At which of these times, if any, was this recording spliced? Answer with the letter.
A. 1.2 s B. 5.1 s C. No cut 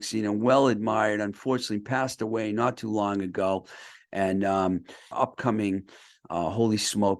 B